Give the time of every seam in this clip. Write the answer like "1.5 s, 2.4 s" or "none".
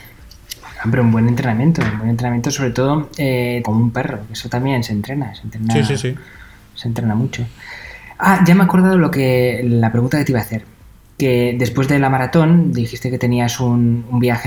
3.6 s

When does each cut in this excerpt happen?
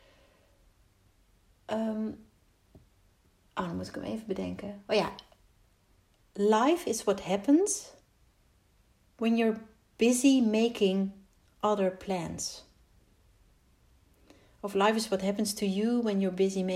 none

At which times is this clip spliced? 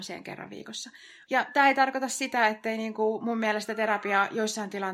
1.3 s

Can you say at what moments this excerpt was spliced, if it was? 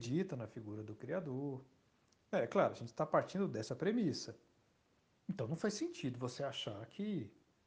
5.2 s

